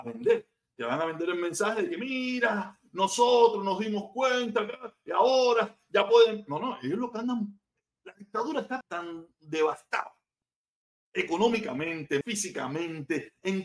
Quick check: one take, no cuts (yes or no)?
no